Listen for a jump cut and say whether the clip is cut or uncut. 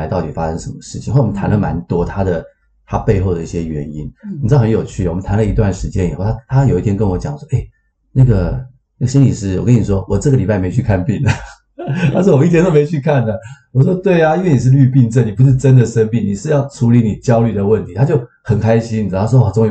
uncut